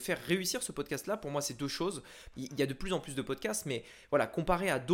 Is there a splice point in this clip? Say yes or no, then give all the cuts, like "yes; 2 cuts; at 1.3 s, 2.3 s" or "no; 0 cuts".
yes; 1 cut; at 2.3 s